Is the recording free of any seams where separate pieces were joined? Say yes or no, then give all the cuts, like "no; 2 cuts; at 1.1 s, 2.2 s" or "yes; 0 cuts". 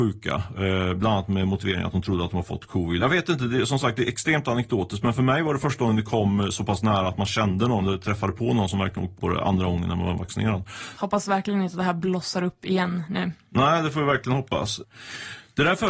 no; 3 cuts; at 3.0 s, 9.2 s, 11.0 s